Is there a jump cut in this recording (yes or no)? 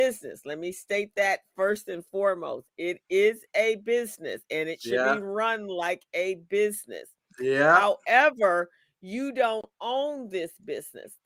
no